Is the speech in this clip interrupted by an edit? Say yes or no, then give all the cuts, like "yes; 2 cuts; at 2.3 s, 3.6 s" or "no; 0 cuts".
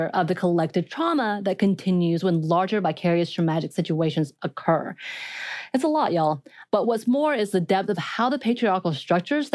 no; 0 cuts